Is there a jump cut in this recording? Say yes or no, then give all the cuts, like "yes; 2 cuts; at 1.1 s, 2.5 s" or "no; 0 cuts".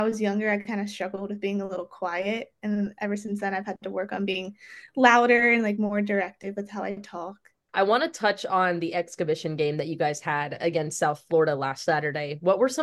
no; 0 cuts